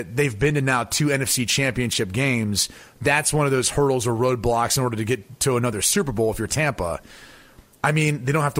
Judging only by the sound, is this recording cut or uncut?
uncut